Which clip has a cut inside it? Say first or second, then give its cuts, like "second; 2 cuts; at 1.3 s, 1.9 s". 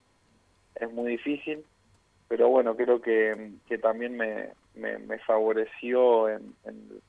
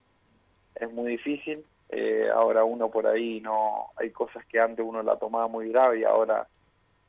second; 1 cut; at 1.8 s